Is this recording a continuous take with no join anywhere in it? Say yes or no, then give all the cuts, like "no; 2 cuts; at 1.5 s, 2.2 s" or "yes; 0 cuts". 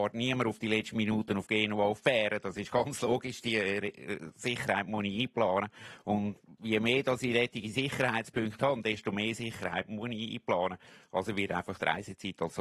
yes; 0 cuts